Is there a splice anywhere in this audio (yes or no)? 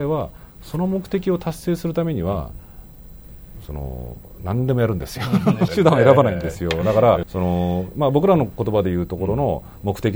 yes